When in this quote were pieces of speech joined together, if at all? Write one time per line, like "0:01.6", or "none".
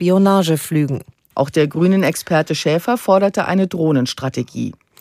0:01.3